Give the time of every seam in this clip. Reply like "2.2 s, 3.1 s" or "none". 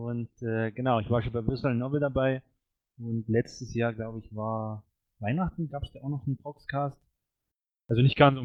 none